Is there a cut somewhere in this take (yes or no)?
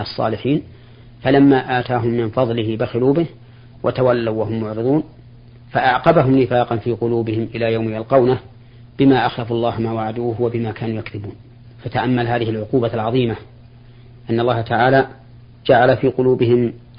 yes